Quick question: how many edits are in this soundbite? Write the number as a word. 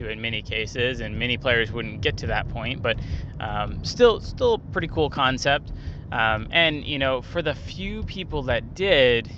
zero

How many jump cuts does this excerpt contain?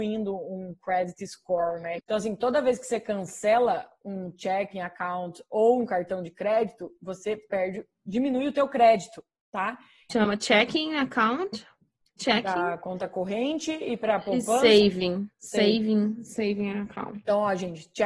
two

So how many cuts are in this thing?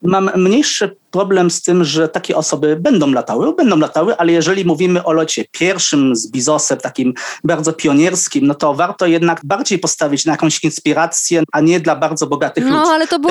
one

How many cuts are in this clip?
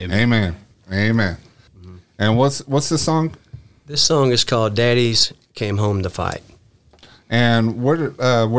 one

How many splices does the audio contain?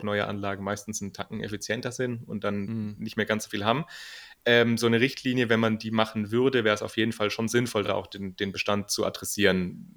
zero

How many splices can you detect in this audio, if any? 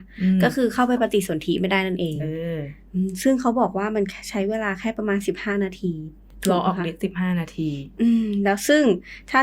zero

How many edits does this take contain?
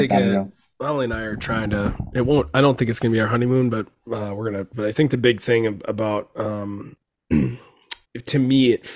two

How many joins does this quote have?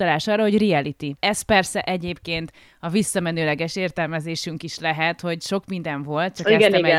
one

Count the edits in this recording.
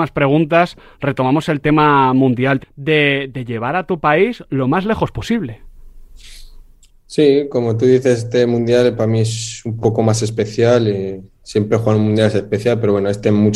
one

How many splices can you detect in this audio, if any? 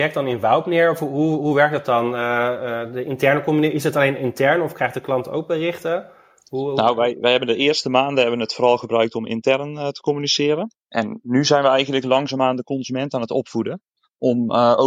two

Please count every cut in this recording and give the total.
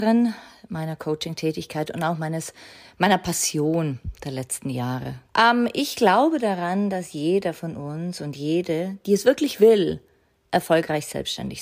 one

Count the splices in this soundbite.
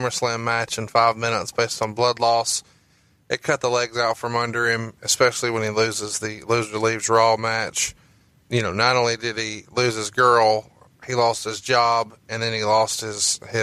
zero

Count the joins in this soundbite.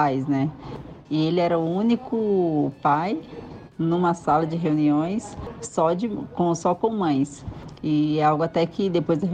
one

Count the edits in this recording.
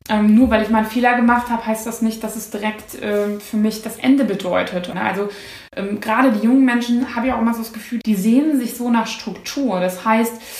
two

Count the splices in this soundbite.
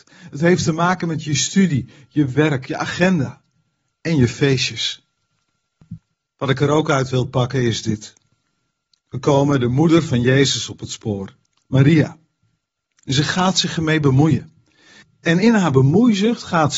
one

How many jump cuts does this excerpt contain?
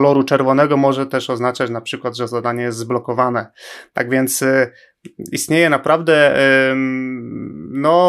zero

